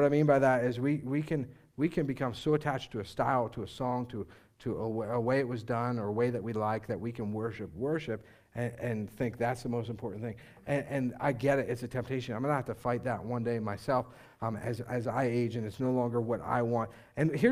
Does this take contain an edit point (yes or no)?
no